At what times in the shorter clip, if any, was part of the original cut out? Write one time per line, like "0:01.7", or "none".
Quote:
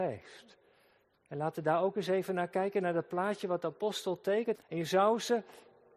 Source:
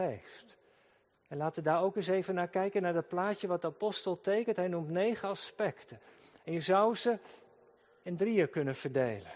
0:04.6